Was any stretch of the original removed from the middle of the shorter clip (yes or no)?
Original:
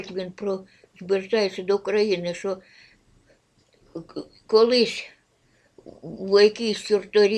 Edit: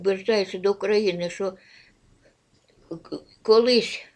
no